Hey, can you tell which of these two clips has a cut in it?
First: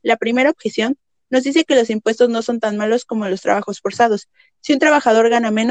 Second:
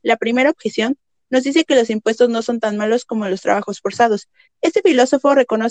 second; 1 cut; at 4.5 s

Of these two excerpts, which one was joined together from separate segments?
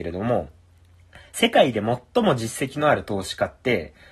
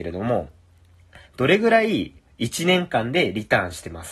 second; 1 cut; at 1.3 s

